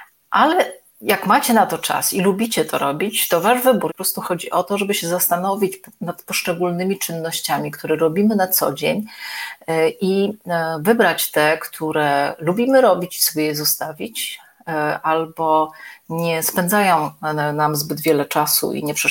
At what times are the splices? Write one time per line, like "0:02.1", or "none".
0:03.9